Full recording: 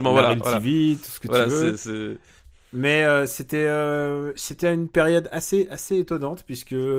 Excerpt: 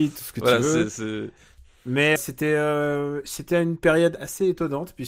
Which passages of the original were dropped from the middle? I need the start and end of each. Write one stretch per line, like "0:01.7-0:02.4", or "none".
0:03.0-0:03.3
0:05.3-0:05.7